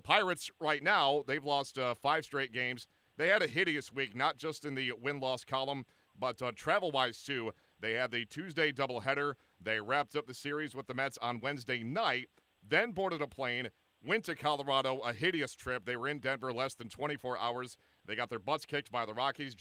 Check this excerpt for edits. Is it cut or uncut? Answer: uncut